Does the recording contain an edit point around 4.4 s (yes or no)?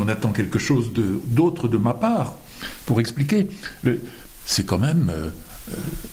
yes